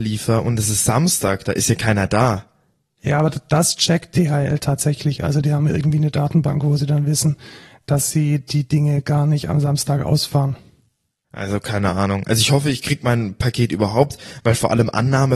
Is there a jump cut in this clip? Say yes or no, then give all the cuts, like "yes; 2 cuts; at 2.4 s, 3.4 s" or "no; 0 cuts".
no; 0 cuts